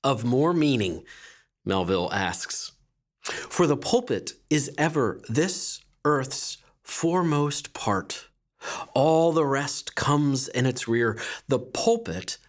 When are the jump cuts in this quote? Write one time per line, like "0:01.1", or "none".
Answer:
none